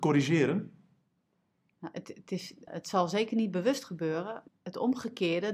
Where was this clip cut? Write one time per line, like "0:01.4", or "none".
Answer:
0:02.7
0:04.5